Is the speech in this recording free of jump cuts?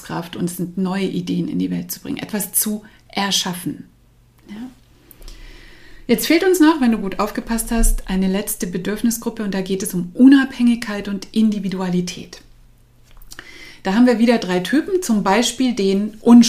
yes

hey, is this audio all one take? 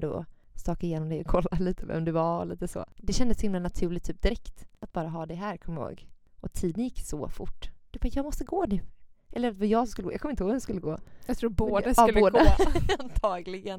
yes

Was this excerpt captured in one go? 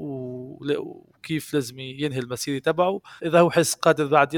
no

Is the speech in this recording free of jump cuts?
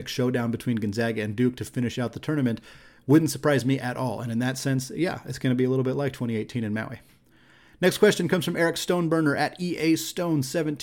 yes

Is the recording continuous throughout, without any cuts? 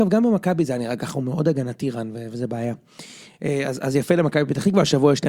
yes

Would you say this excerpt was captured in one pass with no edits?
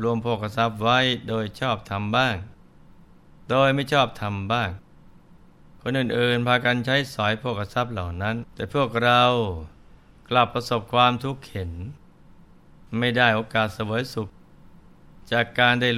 no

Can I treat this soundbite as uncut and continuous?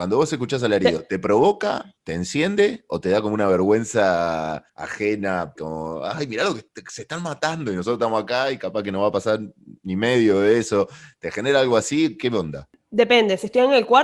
no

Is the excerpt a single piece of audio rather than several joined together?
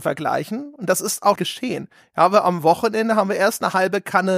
no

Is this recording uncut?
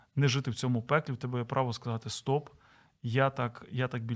yes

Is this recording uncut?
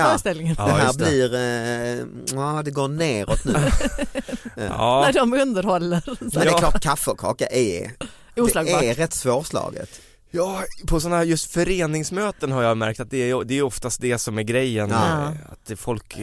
yes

